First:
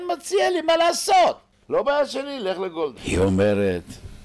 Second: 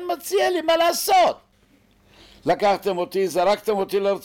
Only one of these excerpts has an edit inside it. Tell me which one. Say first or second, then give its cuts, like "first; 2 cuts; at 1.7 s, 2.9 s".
first; 2 cuts; at 1.6 s, 3.0 s